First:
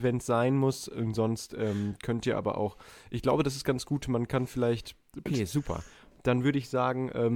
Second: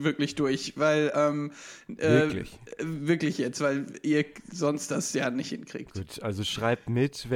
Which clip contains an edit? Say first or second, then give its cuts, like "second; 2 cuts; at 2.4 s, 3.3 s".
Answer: first; 1 cut; at 5.3 s